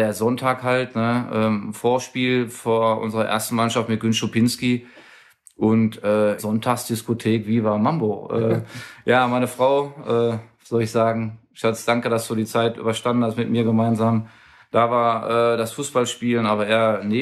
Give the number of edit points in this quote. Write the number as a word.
two